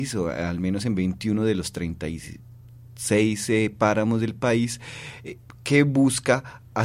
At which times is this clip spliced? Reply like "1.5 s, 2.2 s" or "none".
none